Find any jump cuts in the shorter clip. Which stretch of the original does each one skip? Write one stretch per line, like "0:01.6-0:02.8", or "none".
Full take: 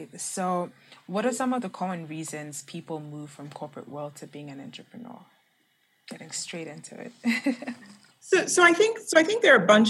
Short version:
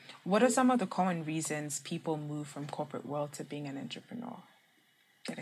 none